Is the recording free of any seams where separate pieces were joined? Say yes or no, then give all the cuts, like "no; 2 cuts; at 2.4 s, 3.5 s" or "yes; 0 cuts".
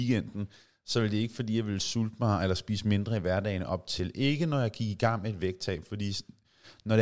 yes; 0 cuts